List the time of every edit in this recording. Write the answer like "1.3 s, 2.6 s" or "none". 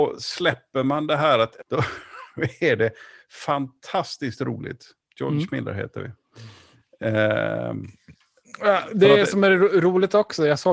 1.6 s